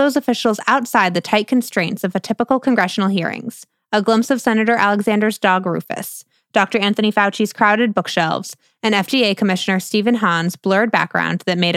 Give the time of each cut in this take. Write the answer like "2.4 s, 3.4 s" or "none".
none